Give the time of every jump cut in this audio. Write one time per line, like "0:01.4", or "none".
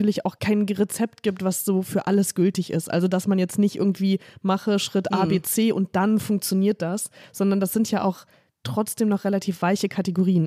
none